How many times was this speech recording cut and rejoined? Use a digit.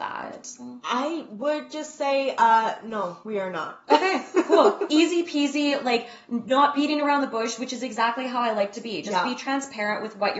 0